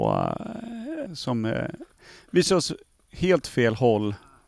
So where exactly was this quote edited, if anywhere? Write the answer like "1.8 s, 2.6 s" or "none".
1.1 s